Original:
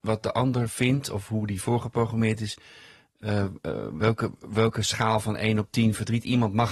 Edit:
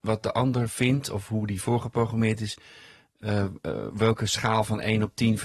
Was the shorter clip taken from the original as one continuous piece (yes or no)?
no